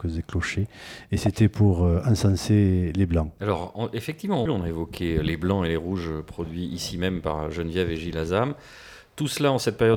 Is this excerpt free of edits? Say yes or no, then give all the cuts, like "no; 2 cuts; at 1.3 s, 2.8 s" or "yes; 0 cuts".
no; 2 cuts; at 3.4 s, 4.5 s